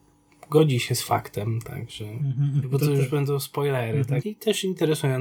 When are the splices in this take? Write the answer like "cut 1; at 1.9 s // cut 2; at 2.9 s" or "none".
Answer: cut 1; at 2.6 s // cut 2; at 4.2 s